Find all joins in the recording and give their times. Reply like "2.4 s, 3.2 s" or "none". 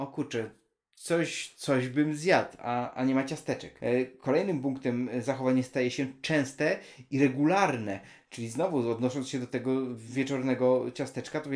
none